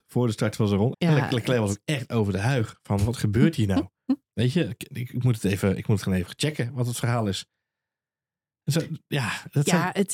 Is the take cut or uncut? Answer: cut